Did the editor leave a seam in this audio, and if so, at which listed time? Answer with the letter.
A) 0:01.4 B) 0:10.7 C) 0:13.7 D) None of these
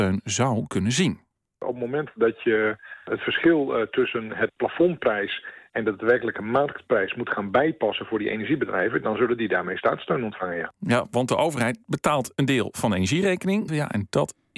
C